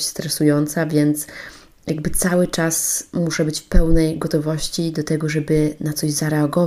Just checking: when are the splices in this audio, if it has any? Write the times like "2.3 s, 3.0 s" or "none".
none